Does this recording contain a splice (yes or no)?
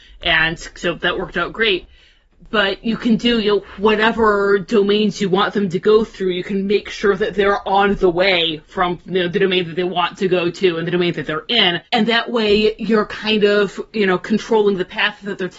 yes